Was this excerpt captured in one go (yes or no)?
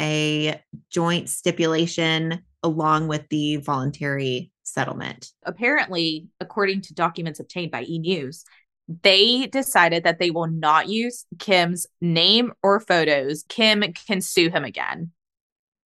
no